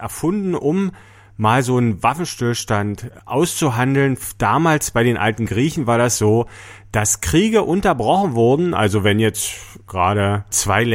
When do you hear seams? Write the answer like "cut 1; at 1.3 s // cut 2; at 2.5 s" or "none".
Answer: none